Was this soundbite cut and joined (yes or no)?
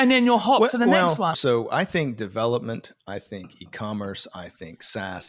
yes